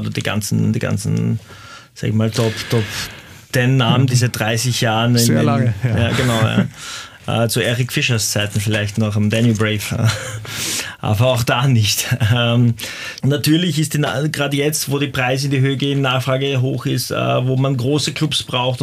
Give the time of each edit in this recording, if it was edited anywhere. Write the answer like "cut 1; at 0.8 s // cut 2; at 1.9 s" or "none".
cut 1; at 13.2 s